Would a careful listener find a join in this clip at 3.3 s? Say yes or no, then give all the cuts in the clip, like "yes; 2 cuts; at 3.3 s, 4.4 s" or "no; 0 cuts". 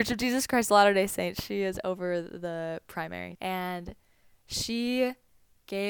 yes; 1 cut; at 3.3 s